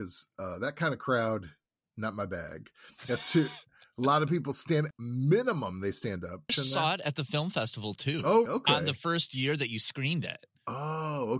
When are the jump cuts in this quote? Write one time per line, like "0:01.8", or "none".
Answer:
0:04.9
0:06.5
0:08.5